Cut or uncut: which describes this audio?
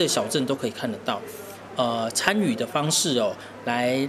cut